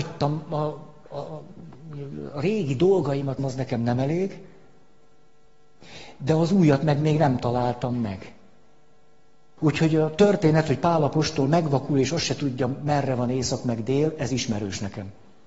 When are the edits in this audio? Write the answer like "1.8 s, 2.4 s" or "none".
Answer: 3.4 s, 9.6 s